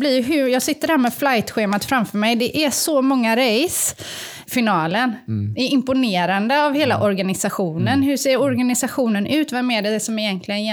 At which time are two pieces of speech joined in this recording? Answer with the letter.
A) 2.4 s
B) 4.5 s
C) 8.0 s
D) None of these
B